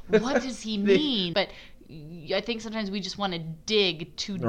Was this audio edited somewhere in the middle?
yes; 1 cut; at 1.3 s

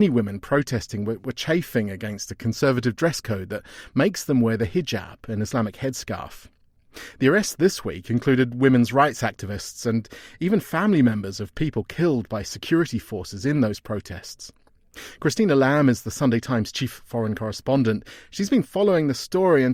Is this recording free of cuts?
yes; 0 cuts

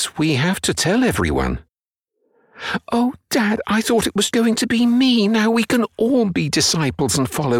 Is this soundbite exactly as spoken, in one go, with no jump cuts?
no; 1 cut; at 4.3 s

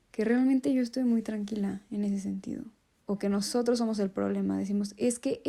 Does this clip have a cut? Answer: yes; 1 cut; at 2.9 s

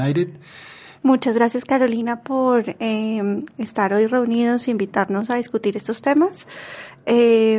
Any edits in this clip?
yes; 1 cut; at 1.0 s

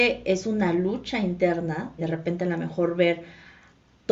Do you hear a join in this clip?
yes; 1 cut; at 2.0 s

